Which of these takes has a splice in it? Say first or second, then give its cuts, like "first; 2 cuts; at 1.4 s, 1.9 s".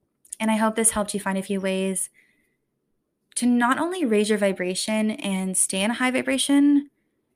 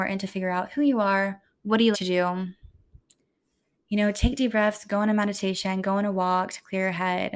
second; 1 cut; at 1.9 s